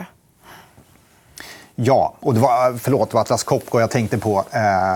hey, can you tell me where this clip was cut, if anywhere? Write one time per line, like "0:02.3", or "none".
none